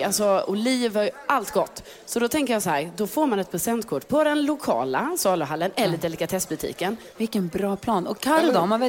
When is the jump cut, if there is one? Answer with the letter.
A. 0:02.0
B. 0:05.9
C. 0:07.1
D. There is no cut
C